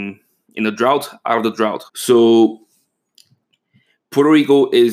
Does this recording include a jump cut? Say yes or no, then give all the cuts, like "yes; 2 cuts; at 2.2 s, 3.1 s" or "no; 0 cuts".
yes; 1 cut; at 1.9 s